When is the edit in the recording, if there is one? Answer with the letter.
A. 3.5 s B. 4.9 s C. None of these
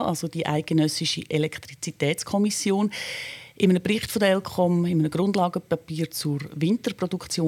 C